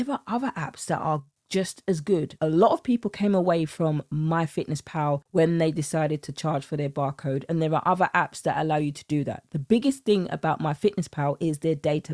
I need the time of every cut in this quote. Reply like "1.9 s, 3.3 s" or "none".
2.4 s